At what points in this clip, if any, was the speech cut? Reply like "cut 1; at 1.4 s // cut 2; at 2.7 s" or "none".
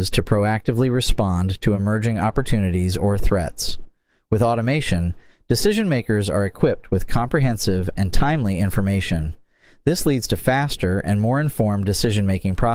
cut 1; at 8.0 s